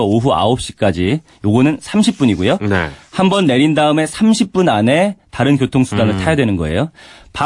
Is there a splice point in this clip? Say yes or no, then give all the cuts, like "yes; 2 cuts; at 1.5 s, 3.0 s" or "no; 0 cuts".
no; 0 cuts